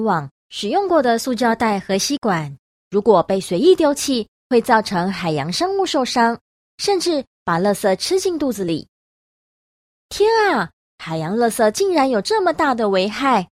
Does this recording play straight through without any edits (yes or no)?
no